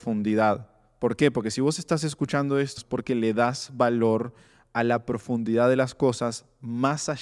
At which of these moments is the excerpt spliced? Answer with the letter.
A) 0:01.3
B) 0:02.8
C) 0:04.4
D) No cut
B